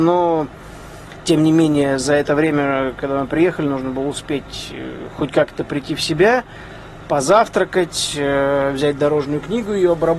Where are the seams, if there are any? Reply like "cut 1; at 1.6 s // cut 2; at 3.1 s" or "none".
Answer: none